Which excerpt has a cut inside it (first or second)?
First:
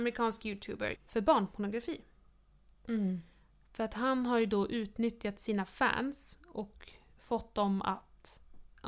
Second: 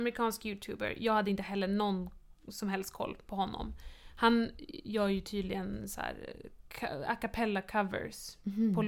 first